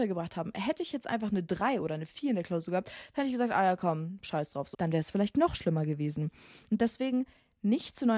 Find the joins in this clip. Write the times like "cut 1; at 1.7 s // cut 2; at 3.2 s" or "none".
cut 1; at 4.7 s

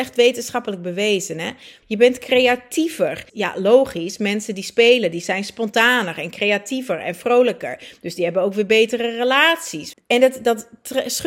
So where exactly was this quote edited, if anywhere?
cut 1; at 1.8 s // cut 2; at 3.3 s // cut 3; at 9.9 s

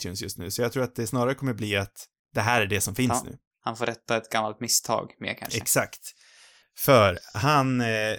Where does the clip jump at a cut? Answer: none

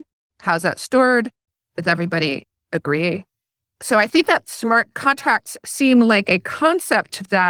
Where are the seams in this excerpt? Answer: none

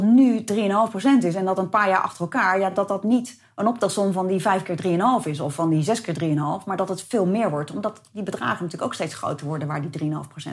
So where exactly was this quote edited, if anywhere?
none

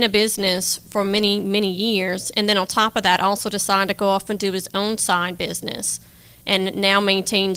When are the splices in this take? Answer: none

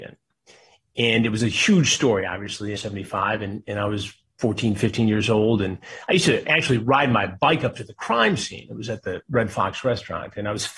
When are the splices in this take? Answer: cut 1; at 2.8 s

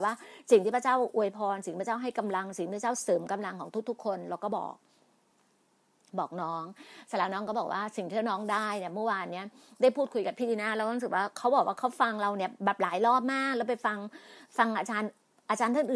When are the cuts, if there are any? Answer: none

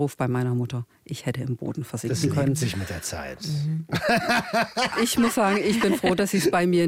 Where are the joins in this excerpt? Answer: cut 1; at 5.0 s

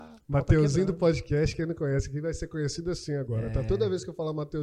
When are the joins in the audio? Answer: none

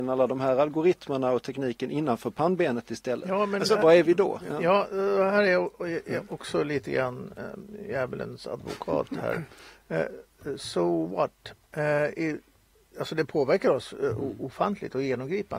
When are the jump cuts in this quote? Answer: none

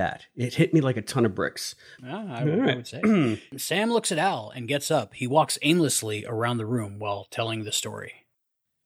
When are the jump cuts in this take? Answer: cut 1; at 2.0 s

